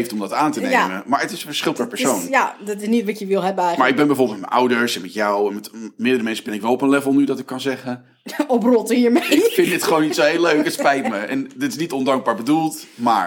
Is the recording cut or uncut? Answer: uncut